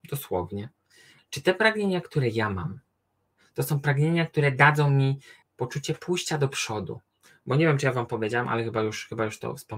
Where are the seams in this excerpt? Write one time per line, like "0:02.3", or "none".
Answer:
0:01.2
0:05.4